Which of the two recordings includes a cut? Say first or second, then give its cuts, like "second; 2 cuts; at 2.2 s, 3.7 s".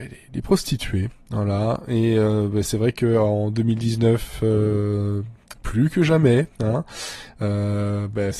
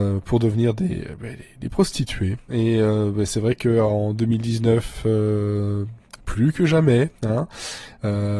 second; 1 cut; at 2.5 s